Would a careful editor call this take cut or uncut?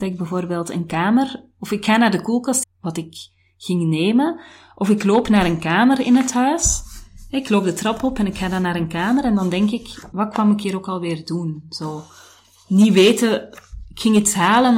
cut